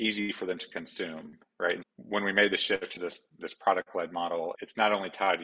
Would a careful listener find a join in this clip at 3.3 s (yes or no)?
no